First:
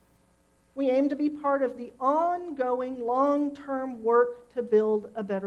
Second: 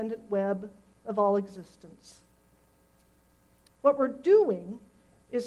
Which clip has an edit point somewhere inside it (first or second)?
second